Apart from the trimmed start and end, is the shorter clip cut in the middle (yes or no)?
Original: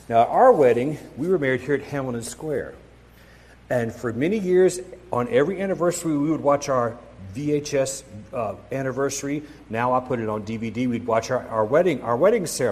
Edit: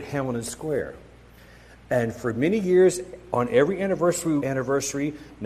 yes